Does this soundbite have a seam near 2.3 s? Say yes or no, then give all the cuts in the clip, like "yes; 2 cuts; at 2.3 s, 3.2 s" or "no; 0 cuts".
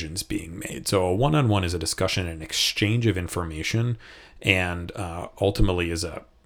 no; 0 cuts